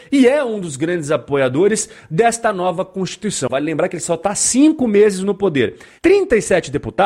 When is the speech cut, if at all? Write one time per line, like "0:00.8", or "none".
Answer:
0:03.5
0:06.0